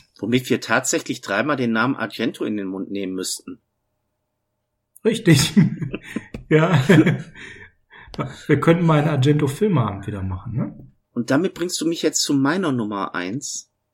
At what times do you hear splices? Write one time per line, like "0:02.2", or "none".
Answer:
0:11.0